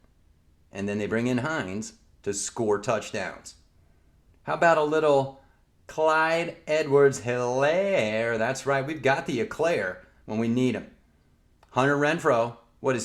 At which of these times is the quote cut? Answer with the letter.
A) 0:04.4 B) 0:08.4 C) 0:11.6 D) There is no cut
D